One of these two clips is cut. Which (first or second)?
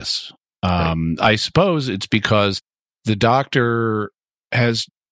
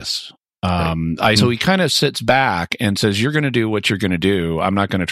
second